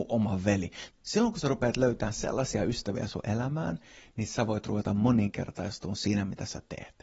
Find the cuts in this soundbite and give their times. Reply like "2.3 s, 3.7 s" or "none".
0.9 s